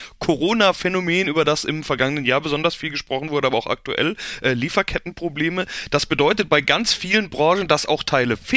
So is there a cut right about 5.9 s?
no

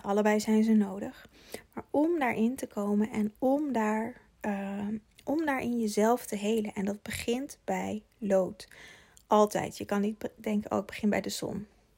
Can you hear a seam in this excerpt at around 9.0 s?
no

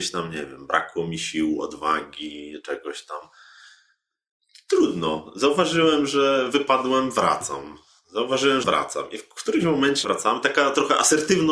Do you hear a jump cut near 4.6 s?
no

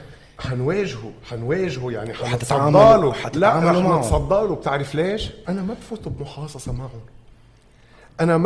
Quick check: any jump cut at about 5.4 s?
yes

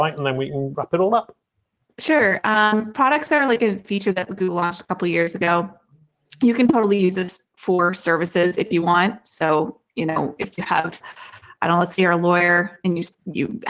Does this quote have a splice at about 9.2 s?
no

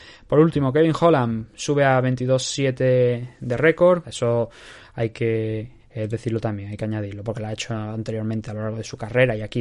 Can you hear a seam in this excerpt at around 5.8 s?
yes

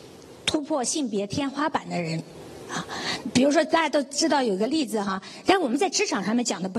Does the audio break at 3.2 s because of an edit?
yes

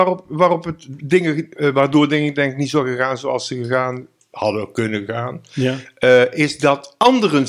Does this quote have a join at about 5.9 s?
no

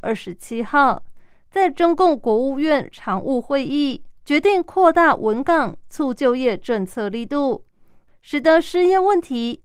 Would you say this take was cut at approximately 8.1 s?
yes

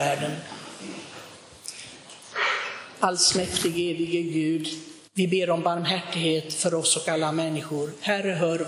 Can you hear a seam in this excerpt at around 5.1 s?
yes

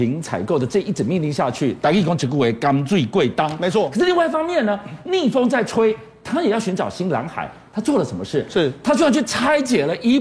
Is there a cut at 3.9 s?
no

